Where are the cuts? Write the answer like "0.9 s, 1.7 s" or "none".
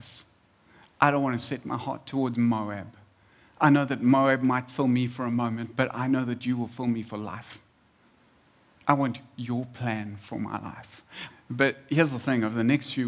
11.3 s